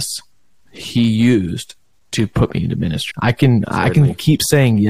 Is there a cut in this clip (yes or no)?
yes